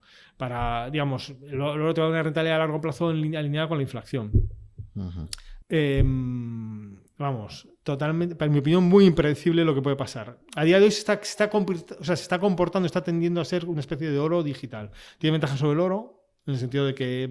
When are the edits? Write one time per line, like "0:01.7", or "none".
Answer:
0:05.6